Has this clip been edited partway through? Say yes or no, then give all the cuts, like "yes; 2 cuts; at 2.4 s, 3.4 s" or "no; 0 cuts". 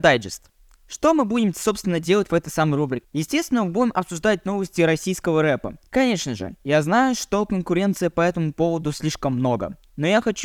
no; 0 cuts